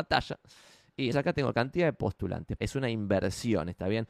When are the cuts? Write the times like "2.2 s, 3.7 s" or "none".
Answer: 1.1 s, 2.6 s